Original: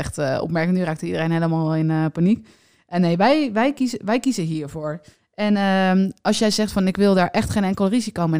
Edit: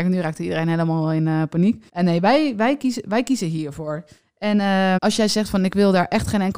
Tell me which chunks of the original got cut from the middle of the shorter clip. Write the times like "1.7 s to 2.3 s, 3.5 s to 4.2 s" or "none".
2.5 s to 2.8 s, 5.9 s to 6.2 s